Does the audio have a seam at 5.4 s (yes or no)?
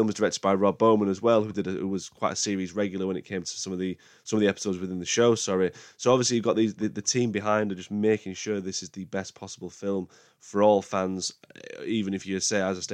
no